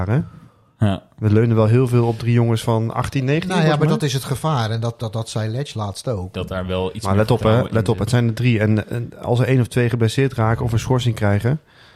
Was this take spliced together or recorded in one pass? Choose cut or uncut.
cut